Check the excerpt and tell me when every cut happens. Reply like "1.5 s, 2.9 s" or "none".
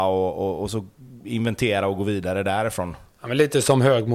none